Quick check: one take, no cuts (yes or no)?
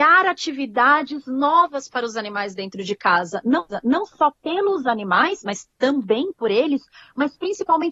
yes